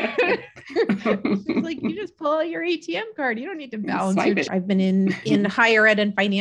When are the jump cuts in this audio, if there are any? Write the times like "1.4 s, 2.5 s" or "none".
4.5 s